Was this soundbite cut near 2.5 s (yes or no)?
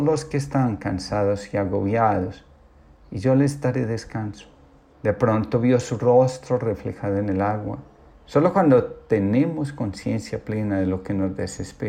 no